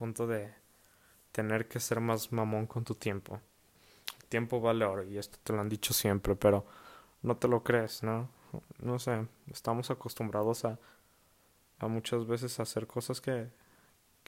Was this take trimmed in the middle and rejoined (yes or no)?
no